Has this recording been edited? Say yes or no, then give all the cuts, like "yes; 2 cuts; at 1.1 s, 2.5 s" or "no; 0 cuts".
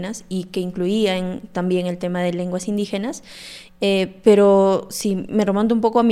yes; 1 cut; at 3.7 s